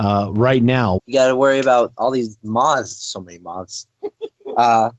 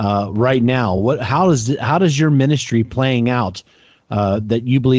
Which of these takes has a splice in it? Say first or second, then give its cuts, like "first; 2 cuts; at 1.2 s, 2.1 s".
first; 1 cut; at 1.0 s